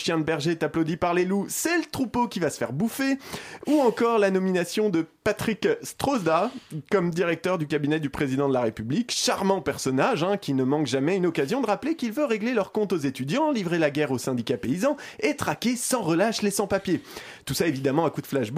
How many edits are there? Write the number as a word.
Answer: zero